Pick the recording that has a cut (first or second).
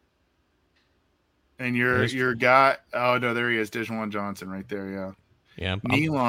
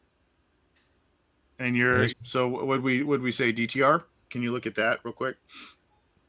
second